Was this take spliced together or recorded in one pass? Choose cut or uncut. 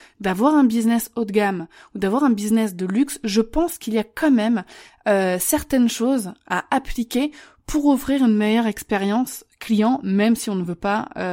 uncut